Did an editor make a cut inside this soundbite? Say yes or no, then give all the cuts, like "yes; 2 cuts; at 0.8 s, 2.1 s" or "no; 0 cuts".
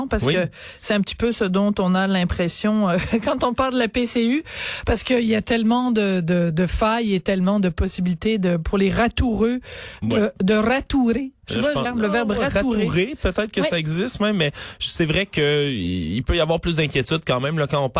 yes; 1 cut; at 11.8 s